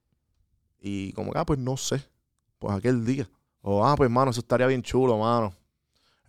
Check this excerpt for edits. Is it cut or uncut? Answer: cut